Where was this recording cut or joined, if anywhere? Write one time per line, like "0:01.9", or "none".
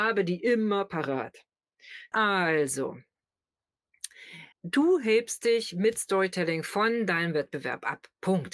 0:02.1
0:04.5